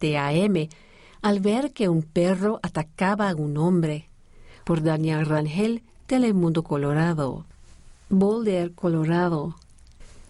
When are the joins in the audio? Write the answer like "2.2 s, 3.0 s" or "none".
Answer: 4.6 s